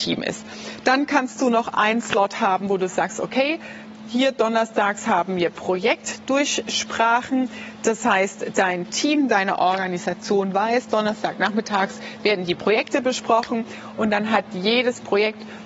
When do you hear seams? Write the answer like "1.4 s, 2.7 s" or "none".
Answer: none